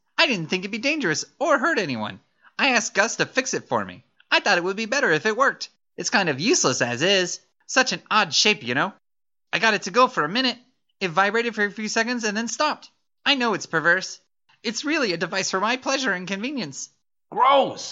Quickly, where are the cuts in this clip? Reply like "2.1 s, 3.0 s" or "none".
none